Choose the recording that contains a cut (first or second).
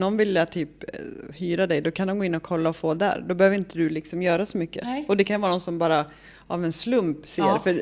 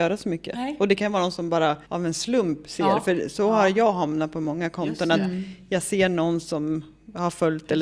second